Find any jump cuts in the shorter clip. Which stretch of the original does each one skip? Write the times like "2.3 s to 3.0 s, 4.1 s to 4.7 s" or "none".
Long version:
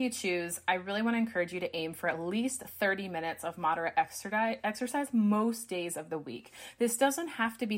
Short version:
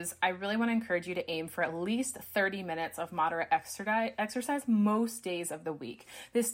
none